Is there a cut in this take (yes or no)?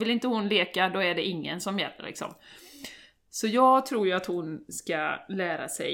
no